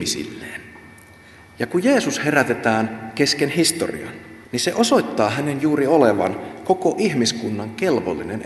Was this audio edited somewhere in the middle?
yes; 1 cut; at 4.4 s

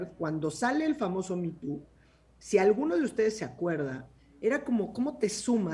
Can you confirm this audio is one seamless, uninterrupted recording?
yes; 0 cuts

